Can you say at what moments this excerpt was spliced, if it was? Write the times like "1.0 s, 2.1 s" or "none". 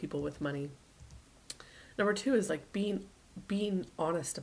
none